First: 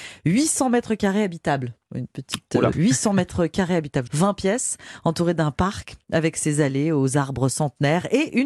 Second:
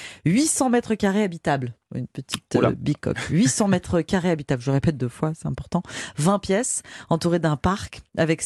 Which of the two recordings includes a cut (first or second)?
first